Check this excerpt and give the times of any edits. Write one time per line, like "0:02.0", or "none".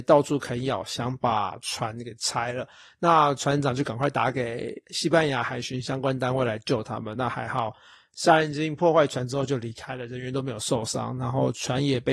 none